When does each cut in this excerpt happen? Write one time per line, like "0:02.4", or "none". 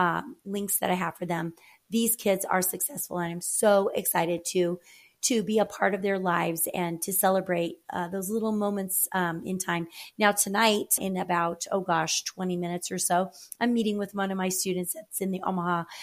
0:11.0